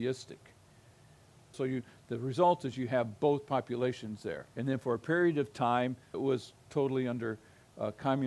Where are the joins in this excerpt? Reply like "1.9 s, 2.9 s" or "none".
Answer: 1.5 s, 4.5 s, 6.1 s